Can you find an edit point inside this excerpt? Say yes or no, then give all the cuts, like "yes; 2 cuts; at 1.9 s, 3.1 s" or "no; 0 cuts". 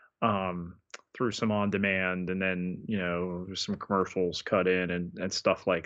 no; 0 cuts